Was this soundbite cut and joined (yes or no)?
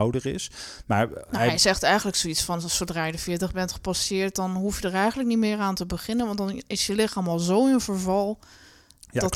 no